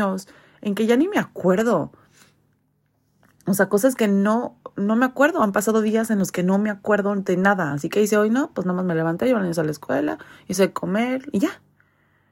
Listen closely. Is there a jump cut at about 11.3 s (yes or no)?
yes